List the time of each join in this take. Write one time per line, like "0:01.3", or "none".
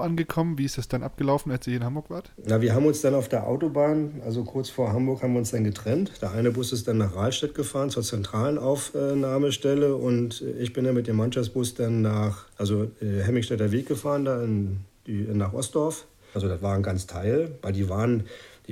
0:12.5
0:16.3